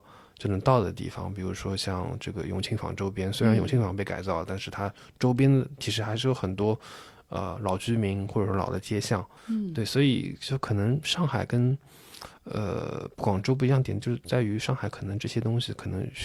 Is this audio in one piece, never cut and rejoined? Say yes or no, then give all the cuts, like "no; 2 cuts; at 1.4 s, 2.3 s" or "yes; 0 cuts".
yes; 0 cuts